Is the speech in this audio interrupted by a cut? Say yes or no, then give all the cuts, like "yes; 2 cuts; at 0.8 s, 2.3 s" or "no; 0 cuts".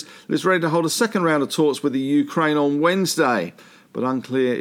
no; 0 cuts